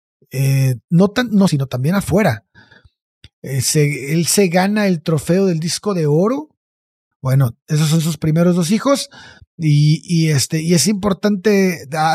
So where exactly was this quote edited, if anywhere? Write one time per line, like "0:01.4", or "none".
0:01.5
0:07.1
0:09.4